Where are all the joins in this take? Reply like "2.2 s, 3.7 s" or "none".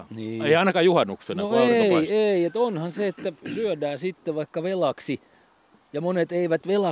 none